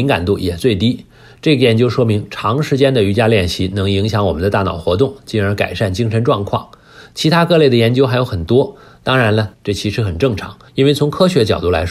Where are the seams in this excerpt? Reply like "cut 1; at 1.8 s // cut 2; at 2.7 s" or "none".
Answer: cut 1; at 9.5 s // cut 2; at 10.7 s